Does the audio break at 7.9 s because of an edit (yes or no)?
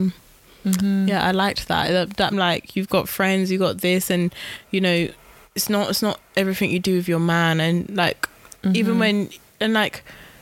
no